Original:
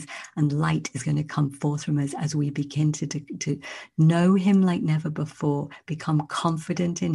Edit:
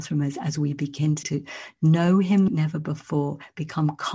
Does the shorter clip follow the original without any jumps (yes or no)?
no